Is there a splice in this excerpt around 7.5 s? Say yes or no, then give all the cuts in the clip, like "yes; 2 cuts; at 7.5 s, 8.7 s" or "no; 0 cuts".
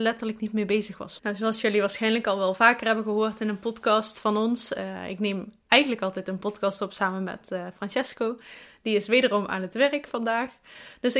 no; 1 cut; at 1.2 s